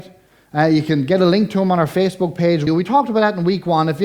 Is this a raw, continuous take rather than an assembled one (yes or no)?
no